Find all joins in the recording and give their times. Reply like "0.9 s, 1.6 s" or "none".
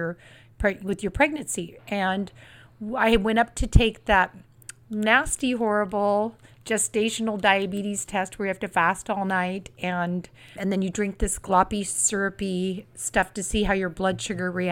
1.8 s, 10.6 s